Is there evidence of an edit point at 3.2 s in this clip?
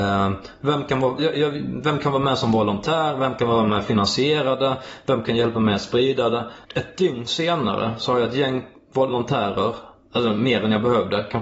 no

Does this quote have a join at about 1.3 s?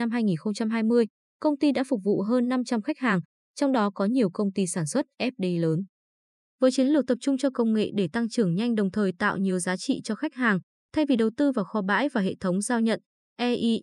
no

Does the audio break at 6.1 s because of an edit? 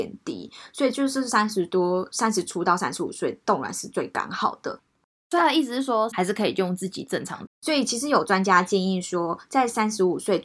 yes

